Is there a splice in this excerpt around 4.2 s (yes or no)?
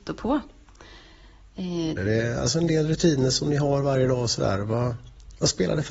no